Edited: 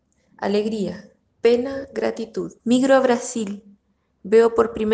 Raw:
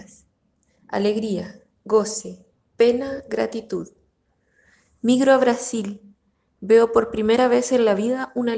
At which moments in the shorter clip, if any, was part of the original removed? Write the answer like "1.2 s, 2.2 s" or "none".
1.3 s, 2.6 s